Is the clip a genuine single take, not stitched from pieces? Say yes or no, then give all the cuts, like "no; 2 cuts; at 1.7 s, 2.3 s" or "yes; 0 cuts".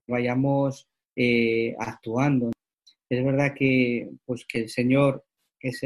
yes; 0 cuts